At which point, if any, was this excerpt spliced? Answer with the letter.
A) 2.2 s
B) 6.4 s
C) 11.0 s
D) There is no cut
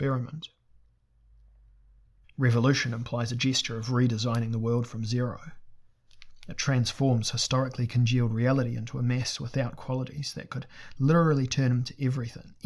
A